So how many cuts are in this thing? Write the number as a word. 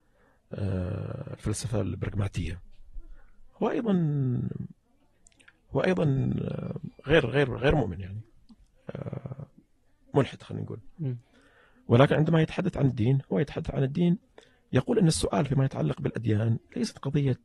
zero